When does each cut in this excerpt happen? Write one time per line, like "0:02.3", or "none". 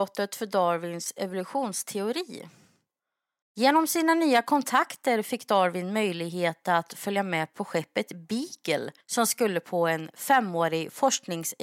0:03.4
0:09.0